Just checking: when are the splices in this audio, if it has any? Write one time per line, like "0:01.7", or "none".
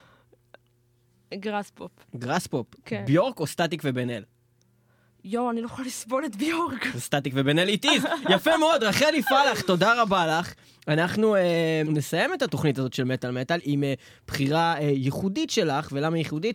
0:11.8